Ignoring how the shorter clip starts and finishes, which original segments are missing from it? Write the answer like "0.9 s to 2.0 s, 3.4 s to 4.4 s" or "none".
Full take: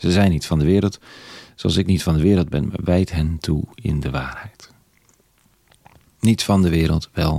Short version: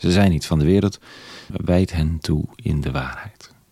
1.5 s to 2.7 s